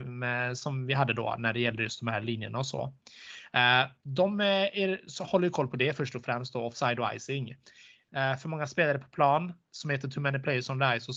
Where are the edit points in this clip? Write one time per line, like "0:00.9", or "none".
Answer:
0:08.1